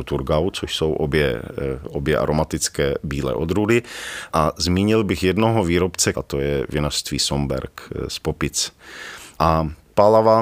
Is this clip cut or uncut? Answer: cut